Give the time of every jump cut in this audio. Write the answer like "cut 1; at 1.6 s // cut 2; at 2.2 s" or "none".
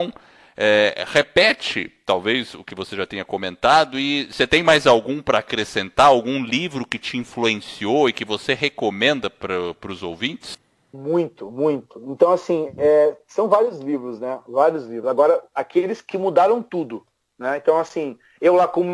none

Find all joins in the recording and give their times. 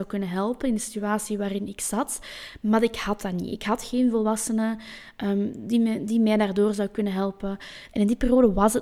cut 1; at 7.9 s

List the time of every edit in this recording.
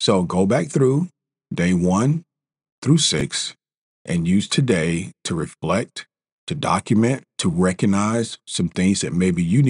cut 1; at 7.4 s

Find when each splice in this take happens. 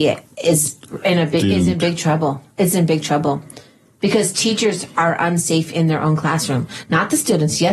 none

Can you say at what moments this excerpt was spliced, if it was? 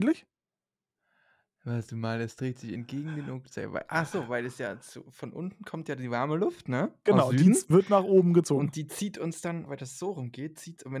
cut 1; at 9.7 s

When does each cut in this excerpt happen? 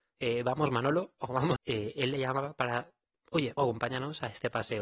cut 1; at 1.6 s // cut 2; at 3.6 s

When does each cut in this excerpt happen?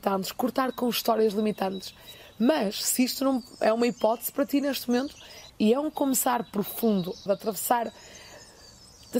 cut 1; at 5.5 s // cut 2; at 7.3 s

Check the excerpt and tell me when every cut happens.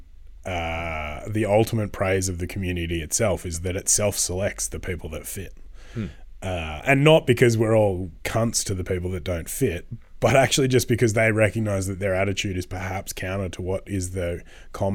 none

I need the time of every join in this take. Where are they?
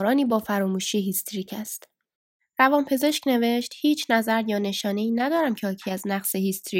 none

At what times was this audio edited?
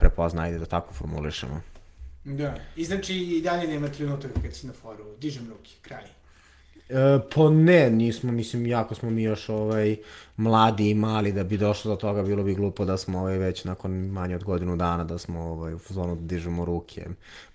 none

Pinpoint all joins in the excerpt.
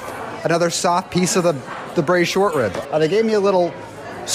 cut 1; at 2.8 s

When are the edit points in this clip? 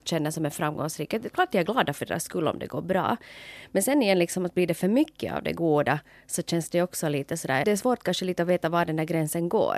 cut 1; at 7.6 s

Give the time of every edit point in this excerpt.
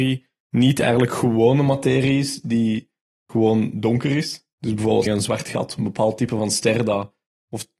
cut 1; at 5.1 s

